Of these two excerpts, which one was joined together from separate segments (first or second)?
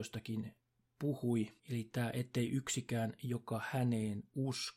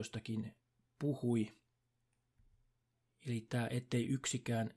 first